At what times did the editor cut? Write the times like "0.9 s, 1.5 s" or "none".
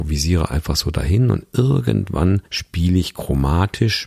2.5 s